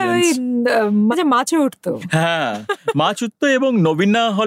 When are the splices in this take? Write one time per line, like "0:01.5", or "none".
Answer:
0:01.1